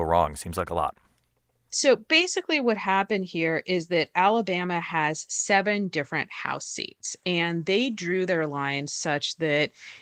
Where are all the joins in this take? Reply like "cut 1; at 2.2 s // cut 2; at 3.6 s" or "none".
cut 1; at 1.7 s